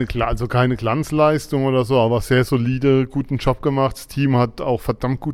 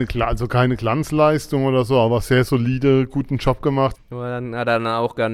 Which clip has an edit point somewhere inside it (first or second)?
second